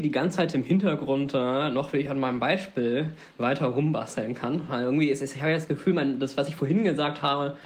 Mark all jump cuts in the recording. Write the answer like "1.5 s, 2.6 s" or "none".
none